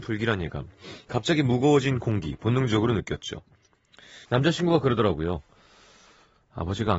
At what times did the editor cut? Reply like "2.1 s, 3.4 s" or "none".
4.2 s